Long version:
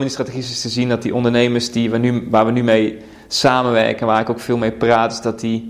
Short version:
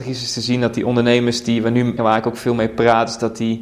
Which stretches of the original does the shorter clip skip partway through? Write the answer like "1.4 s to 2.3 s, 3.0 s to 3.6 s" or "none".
2.2 s to 4.0 s